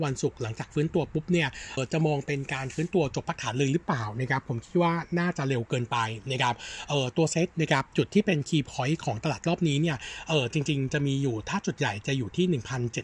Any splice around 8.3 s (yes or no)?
no